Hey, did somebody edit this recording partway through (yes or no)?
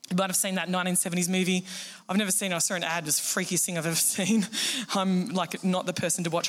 no